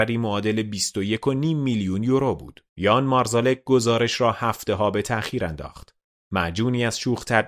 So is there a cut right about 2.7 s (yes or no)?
yes